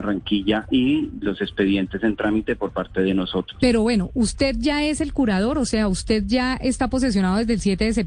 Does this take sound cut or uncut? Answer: cut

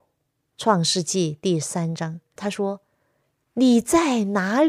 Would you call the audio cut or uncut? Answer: cut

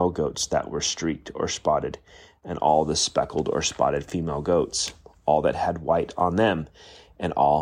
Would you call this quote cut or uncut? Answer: uncut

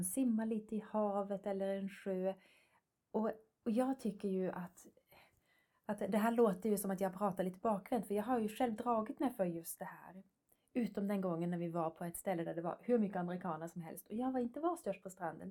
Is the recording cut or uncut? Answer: uncut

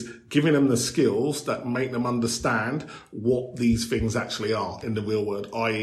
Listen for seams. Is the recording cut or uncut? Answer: uncut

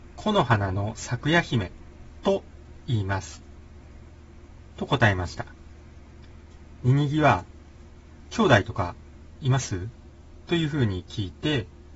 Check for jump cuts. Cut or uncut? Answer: uncut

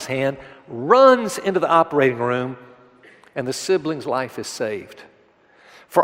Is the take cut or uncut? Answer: uncut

